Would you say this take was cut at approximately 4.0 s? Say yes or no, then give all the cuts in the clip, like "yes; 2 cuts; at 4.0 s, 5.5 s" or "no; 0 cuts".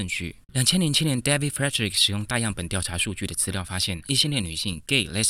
yes; 1 cut; at 4.0 s